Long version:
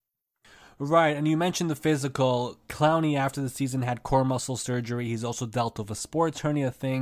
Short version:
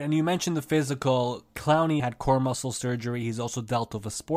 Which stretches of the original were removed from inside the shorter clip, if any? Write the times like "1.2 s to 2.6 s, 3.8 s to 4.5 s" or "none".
3.1 s to 3.8 s